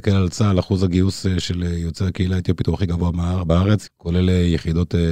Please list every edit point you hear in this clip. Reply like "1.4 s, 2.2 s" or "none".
3.9 s